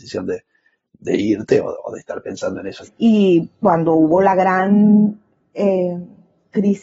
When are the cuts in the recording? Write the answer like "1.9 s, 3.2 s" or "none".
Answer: 2.9 s